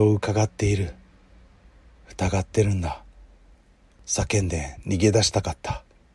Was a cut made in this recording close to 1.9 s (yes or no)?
no